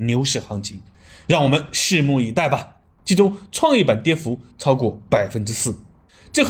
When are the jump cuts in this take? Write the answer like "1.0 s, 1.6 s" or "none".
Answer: 3.0 s

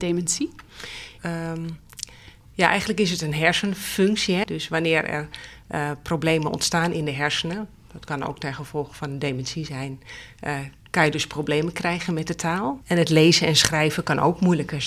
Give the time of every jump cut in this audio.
1.2 s, 4.4 s, 12.8 s

